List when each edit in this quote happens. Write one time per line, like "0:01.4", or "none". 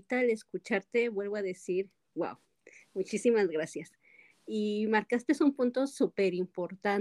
none